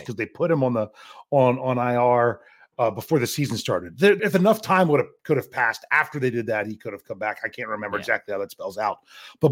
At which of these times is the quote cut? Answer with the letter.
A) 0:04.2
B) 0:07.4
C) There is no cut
A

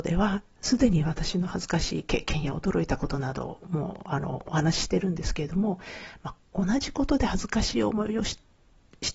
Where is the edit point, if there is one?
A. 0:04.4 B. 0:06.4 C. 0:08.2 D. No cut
B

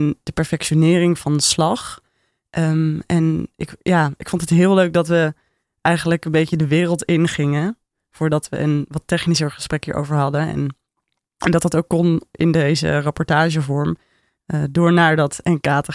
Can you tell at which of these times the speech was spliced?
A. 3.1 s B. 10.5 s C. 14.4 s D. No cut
D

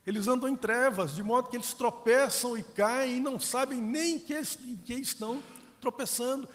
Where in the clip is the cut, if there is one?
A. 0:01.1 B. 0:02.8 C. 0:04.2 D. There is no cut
D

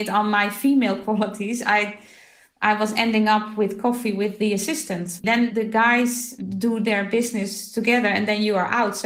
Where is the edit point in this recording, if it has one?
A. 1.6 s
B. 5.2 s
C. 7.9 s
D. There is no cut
B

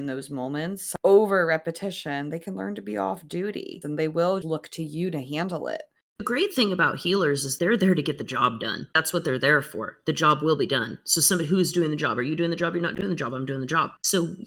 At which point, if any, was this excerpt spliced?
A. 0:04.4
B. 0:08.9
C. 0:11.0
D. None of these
A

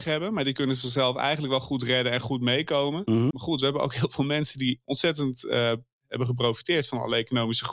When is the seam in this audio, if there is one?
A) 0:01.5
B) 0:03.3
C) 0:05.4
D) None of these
B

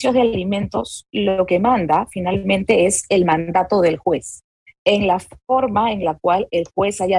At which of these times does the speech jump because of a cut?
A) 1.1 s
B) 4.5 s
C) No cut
C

